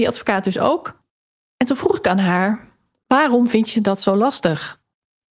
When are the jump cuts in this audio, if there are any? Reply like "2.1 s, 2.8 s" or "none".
1.5 s